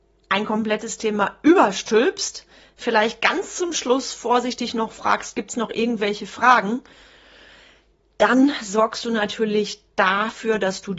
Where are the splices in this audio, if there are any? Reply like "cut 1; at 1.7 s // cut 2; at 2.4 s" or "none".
none

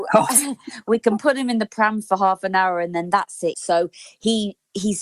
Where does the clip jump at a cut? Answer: cut 1; at 3.5 s

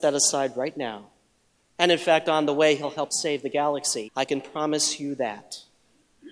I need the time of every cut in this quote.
cut 1; at 1.7 s // cut 2; at 4.1 s

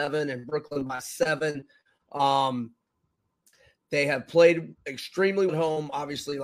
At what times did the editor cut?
cut 1; at 5.5 s

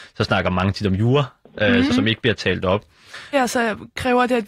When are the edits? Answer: cut 1; at 1.9 s // cut 2; at 3.3 s

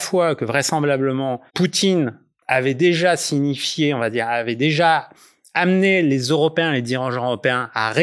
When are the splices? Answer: cut 1; at 1.5 s

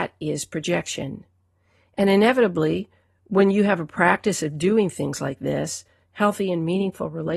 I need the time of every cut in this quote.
cut 1; at 6.0 s

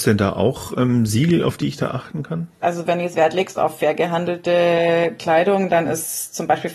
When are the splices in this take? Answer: cut 1; at 2.6 s

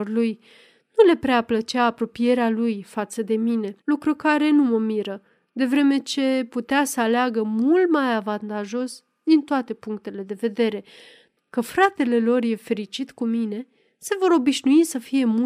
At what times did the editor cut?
cut 1; at 3.8 s // cut 2; at 11.4 s

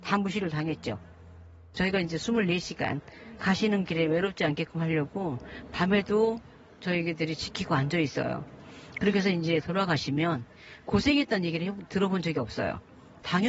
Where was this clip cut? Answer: cut 1; at 1.7 s

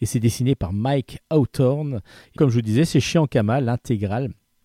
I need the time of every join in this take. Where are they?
cut 1; at 2.4 s

